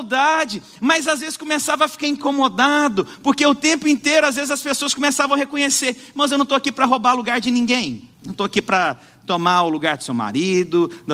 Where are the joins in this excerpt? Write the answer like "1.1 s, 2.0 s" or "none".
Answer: 8.1 s